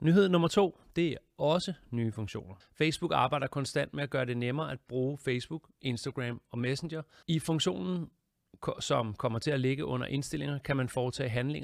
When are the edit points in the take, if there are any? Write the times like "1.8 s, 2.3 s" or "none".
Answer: 2.6 s, 7.2 s